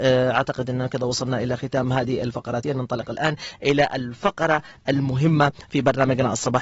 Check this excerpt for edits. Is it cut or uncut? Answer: cut